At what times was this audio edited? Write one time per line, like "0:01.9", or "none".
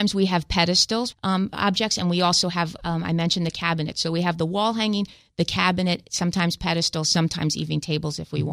0:01.1